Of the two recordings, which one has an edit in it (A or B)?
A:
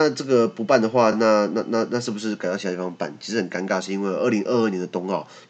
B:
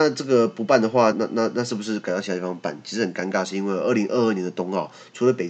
B